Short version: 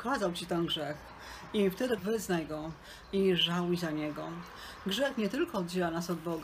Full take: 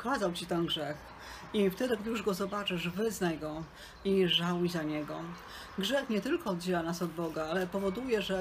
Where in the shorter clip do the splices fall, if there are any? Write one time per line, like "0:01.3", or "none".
0:02.0